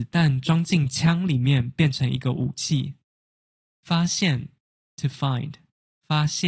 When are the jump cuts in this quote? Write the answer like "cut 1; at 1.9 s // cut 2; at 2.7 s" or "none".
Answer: cut 1; at 3.7 s